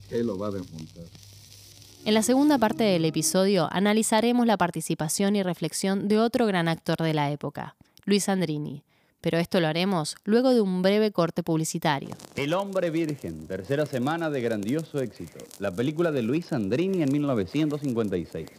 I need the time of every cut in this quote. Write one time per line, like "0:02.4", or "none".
none

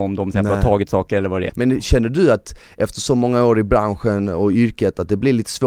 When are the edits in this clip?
0:01.5

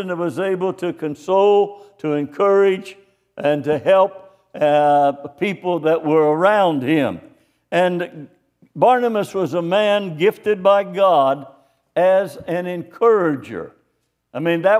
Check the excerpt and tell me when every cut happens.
none

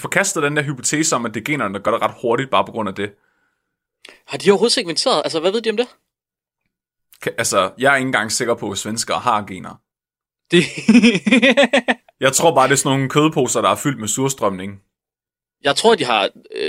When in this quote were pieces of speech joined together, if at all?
none

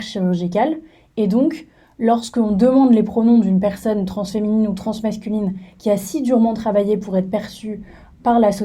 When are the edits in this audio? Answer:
none

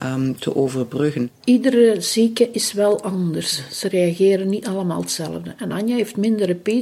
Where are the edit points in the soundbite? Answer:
0:01.3

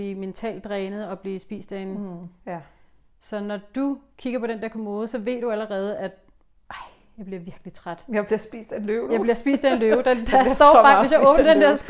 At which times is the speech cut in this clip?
0:02.4

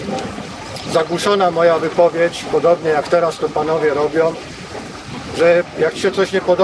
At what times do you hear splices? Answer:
none

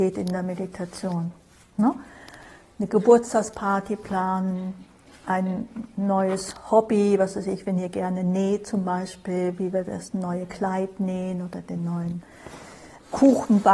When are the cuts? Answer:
none

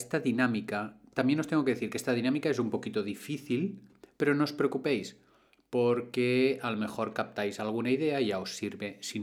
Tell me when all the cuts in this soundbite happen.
none

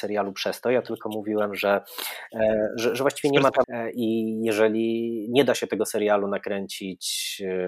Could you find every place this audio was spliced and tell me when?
0:03.6

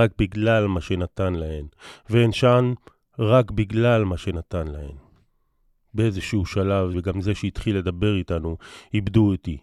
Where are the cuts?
0:06.9

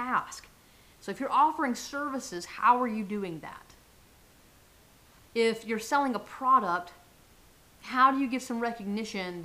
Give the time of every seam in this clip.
0:00.9

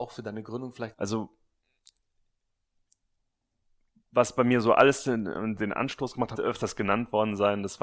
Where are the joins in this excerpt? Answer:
0:00.9
0:06.3

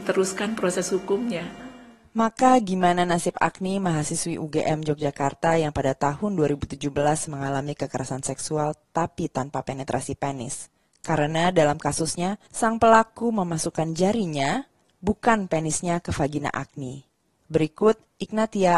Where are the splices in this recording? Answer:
0:12.5

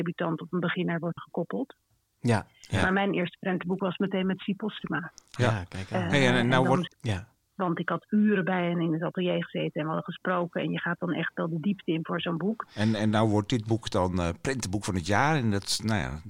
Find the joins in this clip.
0:01.2
0:06.9
0:12.7

